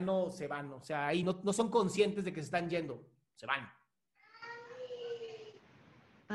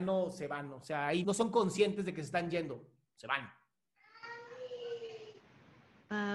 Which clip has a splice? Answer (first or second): second